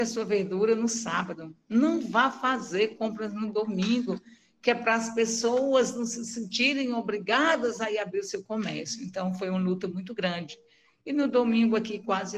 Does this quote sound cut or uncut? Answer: uncut